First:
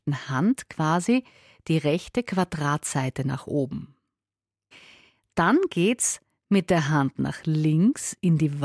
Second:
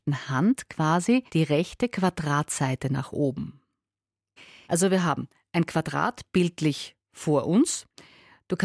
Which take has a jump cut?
second; 2 cuts; at 1.3 s, 4.6 s

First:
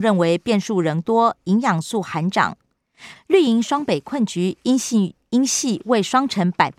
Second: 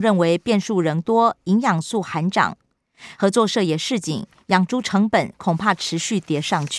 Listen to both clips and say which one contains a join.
first; 1 cut; at 3.2 s

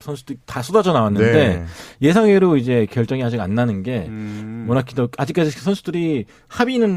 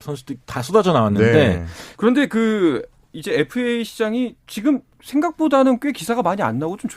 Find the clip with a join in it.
second; 1 cut; at 1.9 s

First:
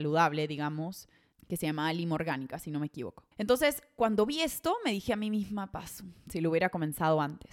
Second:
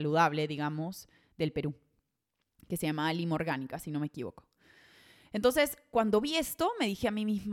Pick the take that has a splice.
first; 2 cuts; at 1.3 s, 3.3 s

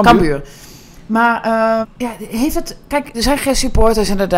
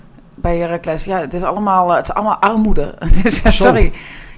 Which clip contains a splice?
first; 2 cuts; at 1.8 s, 3.1 s

